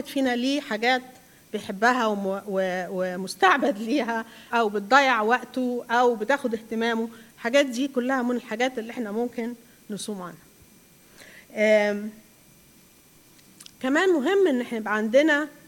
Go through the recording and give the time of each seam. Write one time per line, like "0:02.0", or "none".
0:04.5
0:13.7